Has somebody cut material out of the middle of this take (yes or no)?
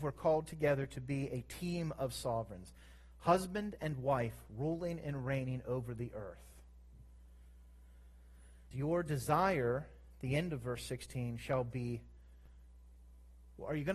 yes